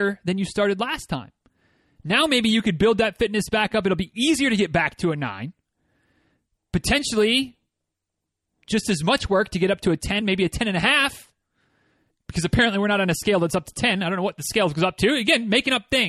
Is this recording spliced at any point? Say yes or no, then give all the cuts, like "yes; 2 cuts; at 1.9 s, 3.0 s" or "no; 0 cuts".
no; 0 cuts